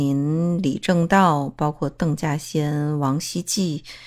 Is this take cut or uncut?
uncut